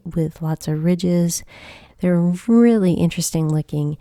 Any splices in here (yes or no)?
yes